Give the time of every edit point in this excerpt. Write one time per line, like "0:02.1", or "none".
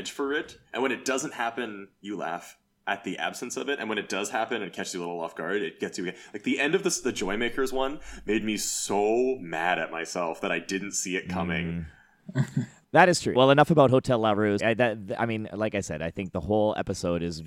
0:13.3
0:14.6